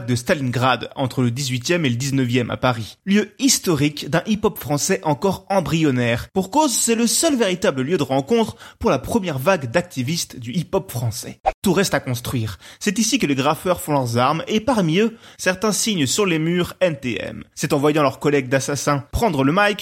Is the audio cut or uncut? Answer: uncut